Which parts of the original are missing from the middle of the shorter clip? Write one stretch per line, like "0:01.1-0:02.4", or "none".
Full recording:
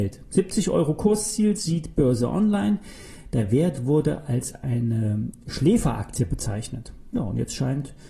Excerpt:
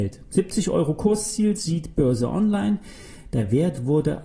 none